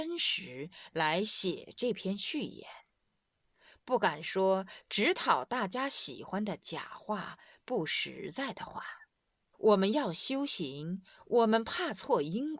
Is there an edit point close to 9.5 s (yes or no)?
yes